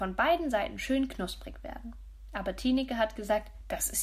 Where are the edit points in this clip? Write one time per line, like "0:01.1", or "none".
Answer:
none